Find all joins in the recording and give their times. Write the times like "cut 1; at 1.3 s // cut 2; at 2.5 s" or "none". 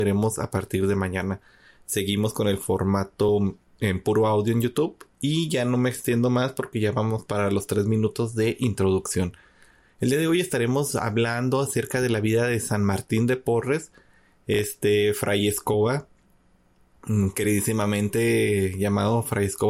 none